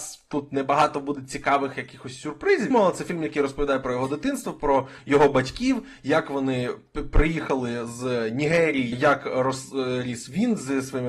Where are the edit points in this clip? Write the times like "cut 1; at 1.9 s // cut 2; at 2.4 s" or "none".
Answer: cut 1; at 2.7 s // cut 2; at 8.9 s